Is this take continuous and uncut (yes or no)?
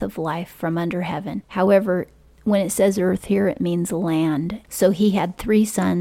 no